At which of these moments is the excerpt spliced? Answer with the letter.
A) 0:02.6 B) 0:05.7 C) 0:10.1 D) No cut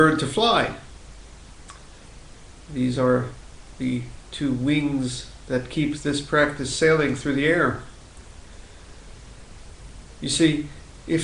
D